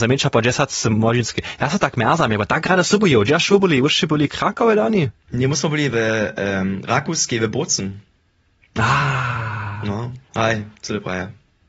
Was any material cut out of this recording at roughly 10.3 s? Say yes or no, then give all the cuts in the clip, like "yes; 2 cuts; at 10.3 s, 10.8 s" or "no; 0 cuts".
yes; 1 cut; at 10.3 s